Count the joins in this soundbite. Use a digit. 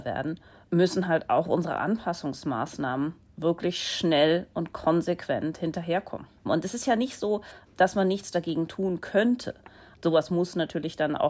2